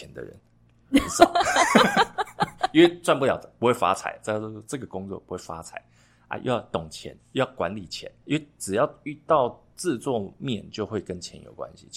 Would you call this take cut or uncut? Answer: uncut